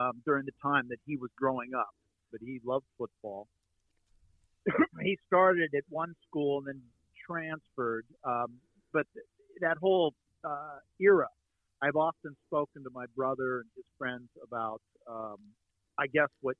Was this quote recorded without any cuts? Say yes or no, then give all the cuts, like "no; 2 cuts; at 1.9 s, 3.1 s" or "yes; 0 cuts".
no; 1 cut; at 2.3 s